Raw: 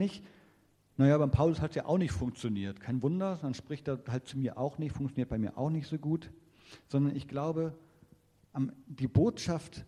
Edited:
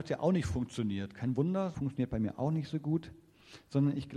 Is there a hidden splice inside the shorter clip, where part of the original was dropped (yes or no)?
yes